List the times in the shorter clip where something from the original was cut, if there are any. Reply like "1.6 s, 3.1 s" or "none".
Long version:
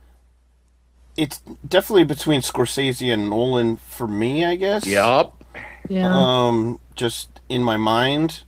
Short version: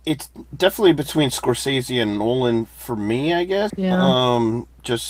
3.7 s